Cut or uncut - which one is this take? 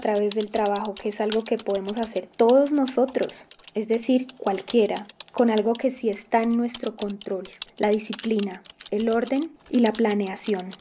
uncut